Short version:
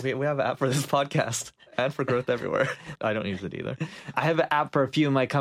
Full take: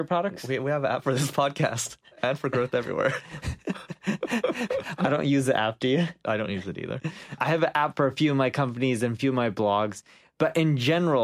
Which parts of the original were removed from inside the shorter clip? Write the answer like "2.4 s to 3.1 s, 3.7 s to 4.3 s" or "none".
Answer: 3.4 s to 6.2 s